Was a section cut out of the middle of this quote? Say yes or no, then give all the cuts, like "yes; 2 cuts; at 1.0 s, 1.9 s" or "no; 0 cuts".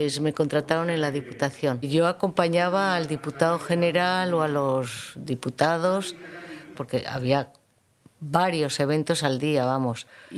yes; 1 cut; at 6.7 s